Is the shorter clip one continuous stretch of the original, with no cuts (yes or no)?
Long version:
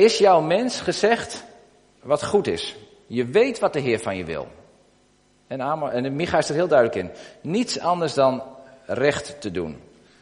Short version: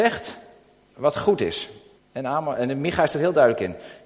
no